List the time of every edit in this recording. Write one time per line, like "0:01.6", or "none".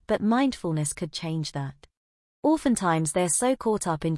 0:02.4